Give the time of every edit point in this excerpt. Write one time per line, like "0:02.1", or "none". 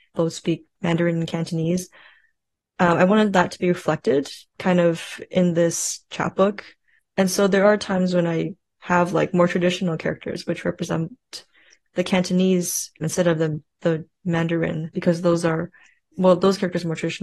none